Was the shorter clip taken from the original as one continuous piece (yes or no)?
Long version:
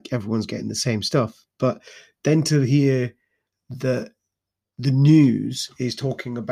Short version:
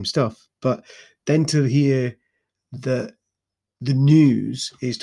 yes